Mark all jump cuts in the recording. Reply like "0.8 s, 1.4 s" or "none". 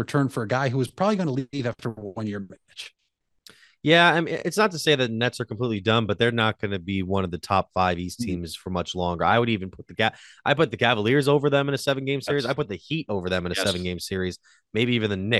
none